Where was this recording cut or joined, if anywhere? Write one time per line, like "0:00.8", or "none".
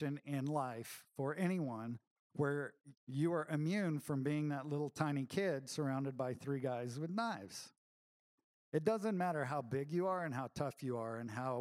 0:03.0